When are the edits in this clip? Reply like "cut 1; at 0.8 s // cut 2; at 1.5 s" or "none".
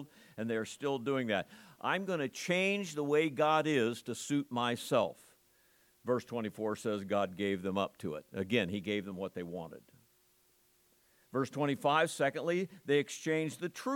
none

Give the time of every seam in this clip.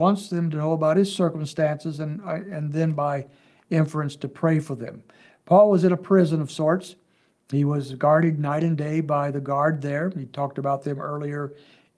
none

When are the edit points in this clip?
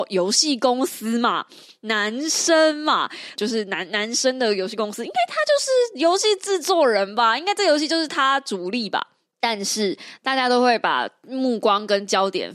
cut 1; at 3.4 s // cut 2; at 9.3 s

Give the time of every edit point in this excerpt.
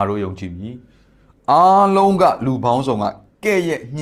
none

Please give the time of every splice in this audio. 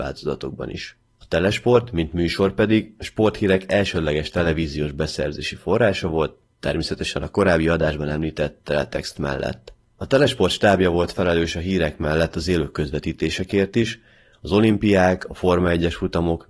none

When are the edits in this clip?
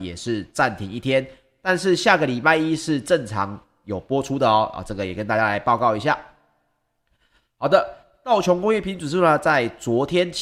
none

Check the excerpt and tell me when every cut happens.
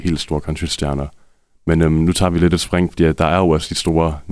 none

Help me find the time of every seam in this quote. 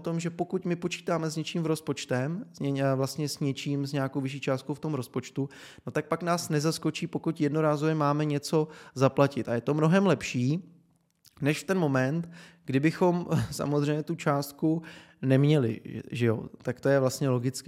none

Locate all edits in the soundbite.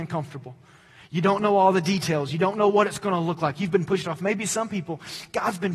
none

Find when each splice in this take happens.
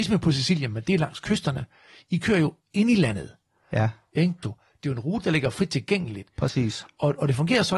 cut 1; at 4.4 s

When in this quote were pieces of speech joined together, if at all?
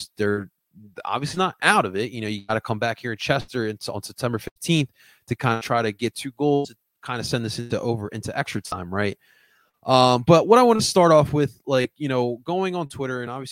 none

